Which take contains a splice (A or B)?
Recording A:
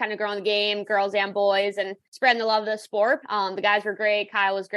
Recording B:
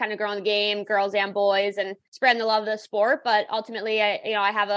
A